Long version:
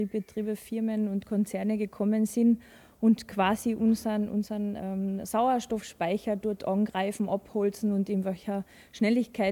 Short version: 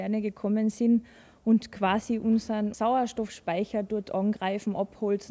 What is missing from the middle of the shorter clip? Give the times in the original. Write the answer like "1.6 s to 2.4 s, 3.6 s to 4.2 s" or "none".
4.3 s to 5.3 s

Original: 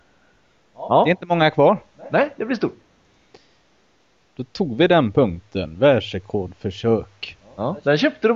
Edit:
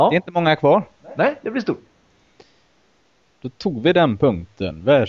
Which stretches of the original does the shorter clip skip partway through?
none

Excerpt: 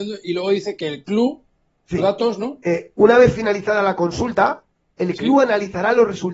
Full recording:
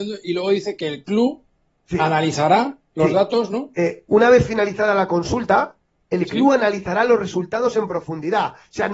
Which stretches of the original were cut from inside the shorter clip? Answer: 2.0 s to 3.1 s

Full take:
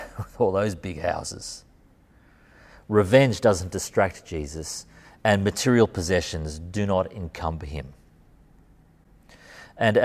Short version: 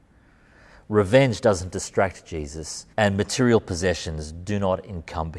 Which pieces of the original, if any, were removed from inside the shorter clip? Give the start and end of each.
4.9 s to 5.2 s

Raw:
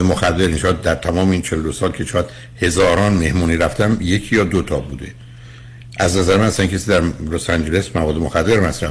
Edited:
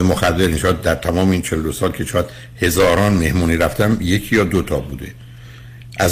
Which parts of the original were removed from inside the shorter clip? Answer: none

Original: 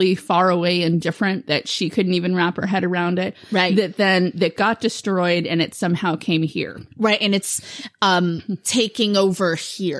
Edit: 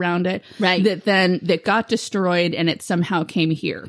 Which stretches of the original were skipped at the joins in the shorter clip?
none

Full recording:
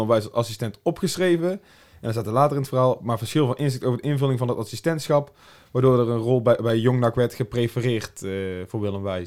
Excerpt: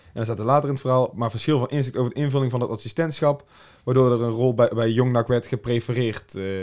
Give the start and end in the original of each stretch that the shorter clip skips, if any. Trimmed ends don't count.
none

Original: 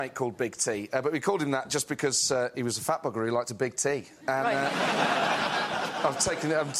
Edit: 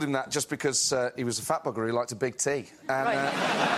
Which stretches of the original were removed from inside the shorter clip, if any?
none

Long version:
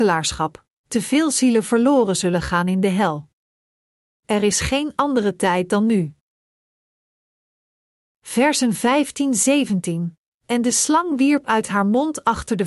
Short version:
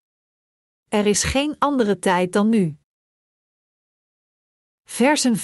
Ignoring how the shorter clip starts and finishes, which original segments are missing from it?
none

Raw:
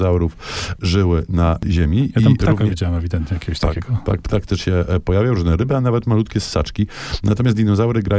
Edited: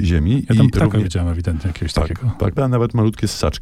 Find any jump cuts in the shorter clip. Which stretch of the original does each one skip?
4.2 s to 5.7 s

